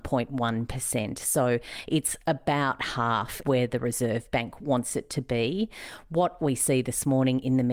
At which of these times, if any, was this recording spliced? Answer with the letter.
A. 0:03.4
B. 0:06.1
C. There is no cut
A